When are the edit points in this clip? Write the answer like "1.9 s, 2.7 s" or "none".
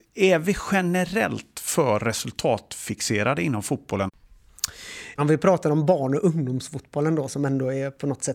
5.2 s